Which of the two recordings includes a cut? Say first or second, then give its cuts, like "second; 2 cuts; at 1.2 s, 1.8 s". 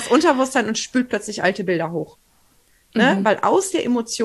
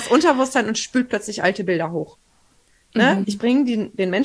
second; 1 cut; at 3.2 s